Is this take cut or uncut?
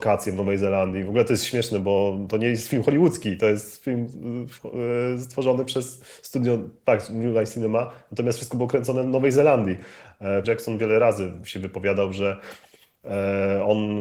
cut